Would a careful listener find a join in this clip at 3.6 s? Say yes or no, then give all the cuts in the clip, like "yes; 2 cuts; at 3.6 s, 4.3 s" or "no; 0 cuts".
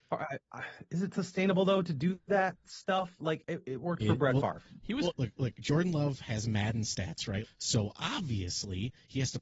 no; 2 cuts; at 5.1 s, 7.4 s